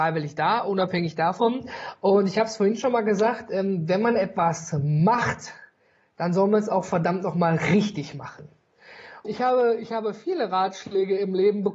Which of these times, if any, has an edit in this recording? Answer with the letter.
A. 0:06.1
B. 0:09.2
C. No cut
B